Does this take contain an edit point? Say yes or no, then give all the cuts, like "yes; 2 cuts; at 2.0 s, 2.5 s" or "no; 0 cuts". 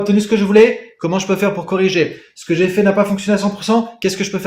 no; 0 cuts